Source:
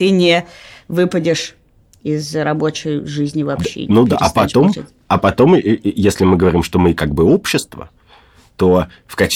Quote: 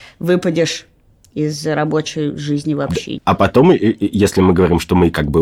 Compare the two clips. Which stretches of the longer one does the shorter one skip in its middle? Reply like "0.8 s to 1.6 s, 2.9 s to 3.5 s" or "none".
3.9 s to 5.0 s